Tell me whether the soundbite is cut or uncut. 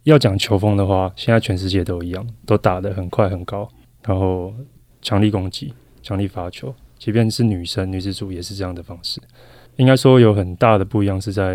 cut